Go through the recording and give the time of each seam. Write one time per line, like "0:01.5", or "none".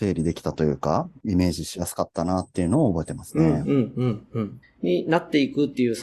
0:04.6